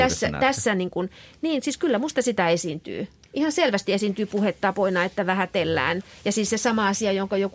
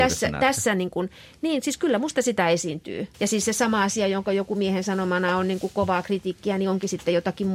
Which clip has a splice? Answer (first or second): second